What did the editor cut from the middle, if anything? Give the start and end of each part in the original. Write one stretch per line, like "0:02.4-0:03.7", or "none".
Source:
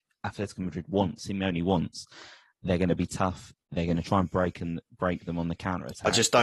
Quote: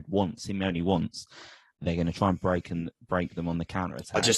0:02.5-0:03.6